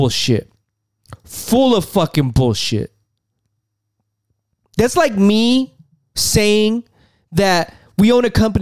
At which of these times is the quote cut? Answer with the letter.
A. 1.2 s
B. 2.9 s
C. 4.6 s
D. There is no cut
C